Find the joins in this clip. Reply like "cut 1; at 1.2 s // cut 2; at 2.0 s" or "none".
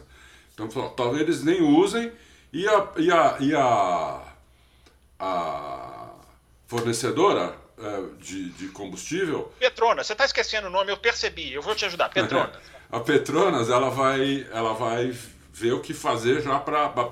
none